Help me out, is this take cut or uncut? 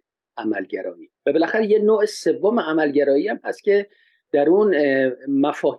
cut